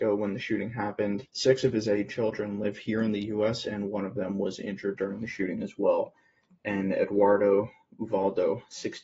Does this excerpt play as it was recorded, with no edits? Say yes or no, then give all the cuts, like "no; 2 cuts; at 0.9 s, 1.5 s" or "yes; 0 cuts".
no; 1 cut; at 1.2 s